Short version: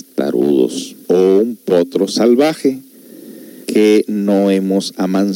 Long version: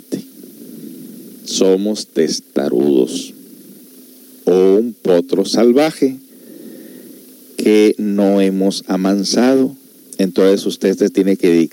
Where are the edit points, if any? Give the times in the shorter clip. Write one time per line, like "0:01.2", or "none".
0:01.0
0:03.6